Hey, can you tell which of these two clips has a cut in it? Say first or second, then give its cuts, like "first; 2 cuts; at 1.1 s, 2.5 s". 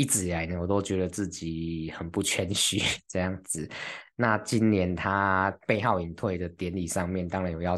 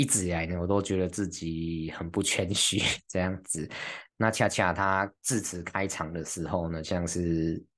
second; 3 cuts; at 4.1 s, 5.2 s, 6.8 s